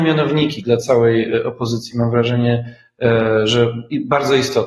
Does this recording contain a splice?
no; 0 cuts

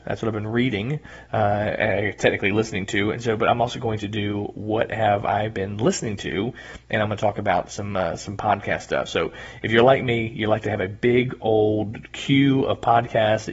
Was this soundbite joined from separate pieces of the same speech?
no; 0 cuts

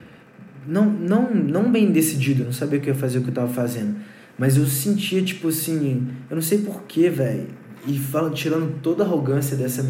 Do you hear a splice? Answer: yes; 1 cut; at 2.4 s

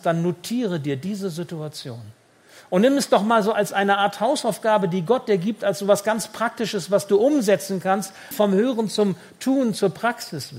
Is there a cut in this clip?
yes; 1 cut; at 8.3 s

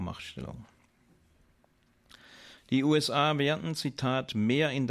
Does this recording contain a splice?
yes; 1 cut; at 2.6 s

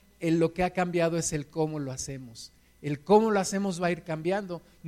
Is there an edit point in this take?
no; 0 cuts

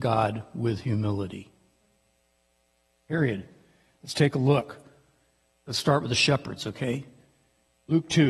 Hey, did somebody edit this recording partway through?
no; 0 cuts

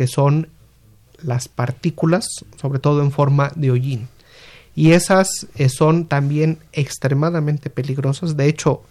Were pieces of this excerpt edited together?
no; 0 cuts

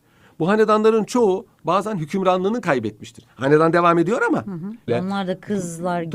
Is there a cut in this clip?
yes; 1 cut; at 4.9 s

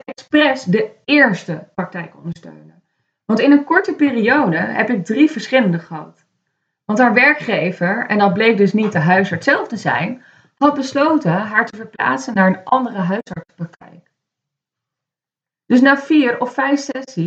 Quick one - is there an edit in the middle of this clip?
no; 0 cuts

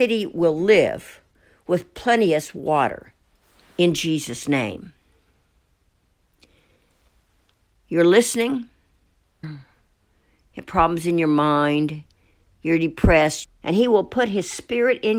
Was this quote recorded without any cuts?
no; 2 cuts; at 9.4 s, 13.4 s

